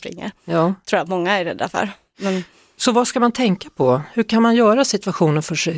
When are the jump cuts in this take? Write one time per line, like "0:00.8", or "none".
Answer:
none

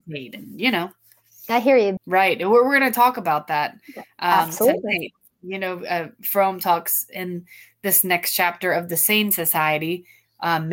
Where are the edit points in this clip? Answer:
0:02.0

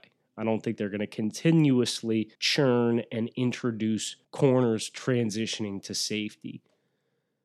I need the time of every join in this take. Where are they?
0:02.4
0:04.2

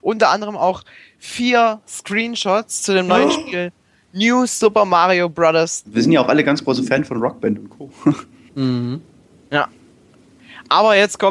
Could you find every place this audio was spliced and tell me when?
0:05.8

